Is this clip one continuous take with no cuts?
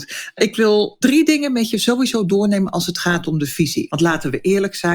no; 1 cut; at 3.9 s

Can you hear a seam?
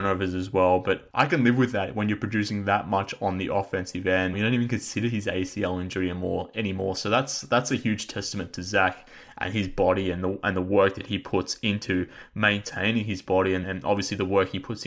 yes; 2 cuts; at 4.3 s, 13.6 s

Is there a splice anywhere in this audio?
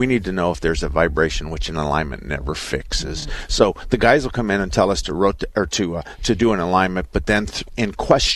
no; 0 cuts

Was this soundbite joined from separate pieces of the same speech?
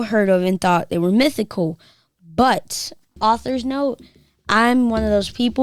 yes; 1 cut; at 3.2 s

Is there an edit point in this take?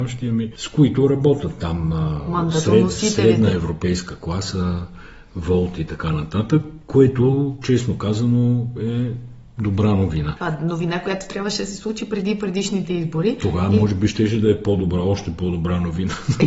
no; 0 cuts

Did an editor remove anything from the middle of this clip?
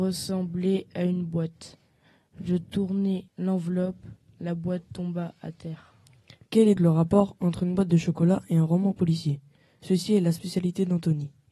yes; 2 cuts; at 3.3 s, 6.8 s

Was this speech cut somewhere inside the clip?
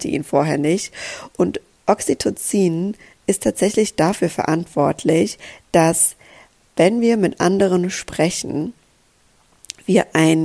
no; 0 cuts

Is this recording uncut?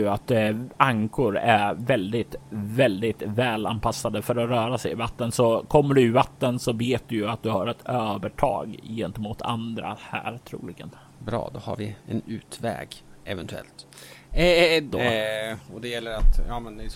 no; 2 cuts; at 12.0 s, 14.9 s

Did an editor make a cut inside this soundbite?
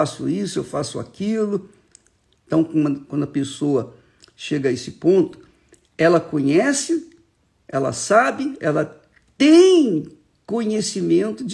yes; 1 cut; at 2.3 s

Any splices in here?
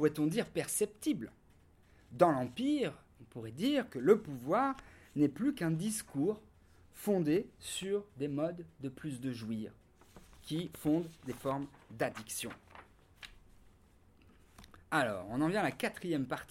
yes; 2 cuts; at 10.7 s, 14.8 s

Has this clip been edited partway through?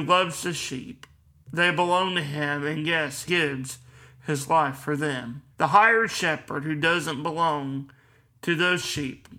yes; 2 cuts; at 3.3 s, 5.5 s

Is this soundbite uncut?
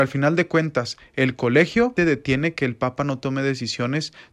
no; 1 cut; at 2.0 s

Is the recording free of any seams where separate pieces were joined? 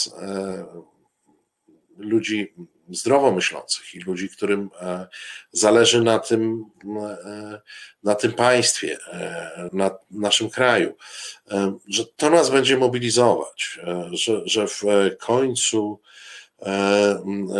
no; 1 cut; at 9.7 s

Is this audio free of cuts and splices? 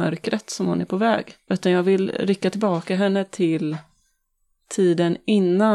yes; 0 cuts

